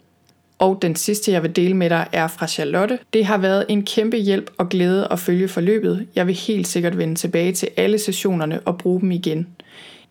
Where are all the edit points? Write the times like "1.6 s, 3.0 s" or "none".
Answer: 3.0 s